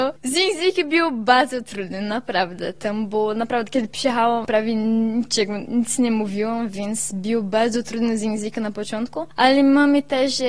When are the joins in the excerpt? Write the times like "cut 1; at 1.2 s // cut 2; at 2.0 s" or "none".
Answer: none